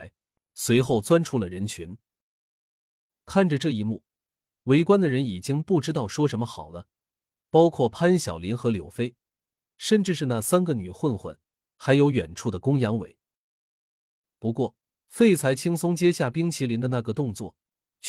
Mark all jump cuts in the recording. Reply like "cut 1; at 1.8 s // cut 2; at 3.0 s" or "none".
none